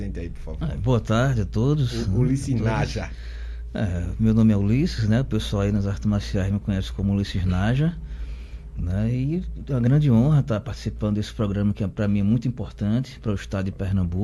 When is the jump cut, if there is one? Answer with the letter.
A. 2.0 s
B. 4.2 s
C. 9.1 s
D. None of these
D